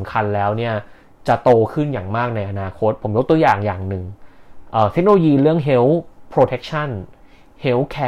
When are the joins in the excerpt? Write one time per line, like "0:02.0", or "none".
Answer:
none